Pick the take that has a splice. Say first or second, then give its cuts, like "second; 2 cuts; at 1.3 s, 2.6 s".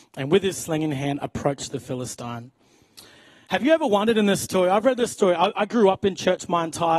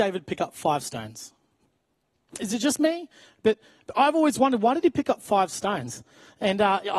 second; 1 cut; at 2.4 s